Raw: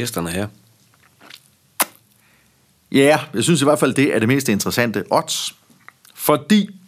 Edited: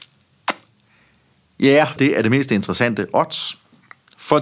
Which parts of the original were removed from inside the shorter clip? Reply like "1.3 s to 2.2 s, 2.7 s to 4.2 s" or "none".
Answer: 3.3 s to 3.9 s